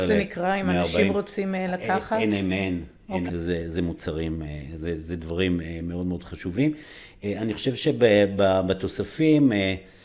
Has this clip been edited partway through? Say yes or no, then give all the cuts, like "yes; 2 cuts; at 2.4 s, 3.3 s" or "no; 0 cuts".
yes; 1 cut; at 3.3 s